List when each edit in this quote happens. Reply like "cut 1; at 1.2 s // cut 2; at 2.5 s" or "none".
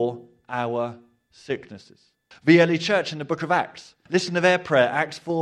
cut 1; at 2.3 s // cut 2; at 4.1 s